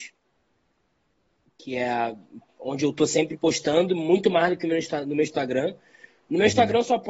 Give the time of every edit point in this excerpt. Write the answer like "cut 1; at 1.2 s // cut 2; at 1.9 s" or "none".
none